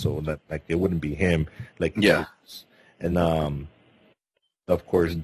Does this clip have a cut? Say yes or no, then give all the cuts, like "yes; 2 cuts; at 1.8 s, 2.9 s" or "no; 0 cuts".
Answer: yes; 2 cuts; at 1.7 s, 3.1 s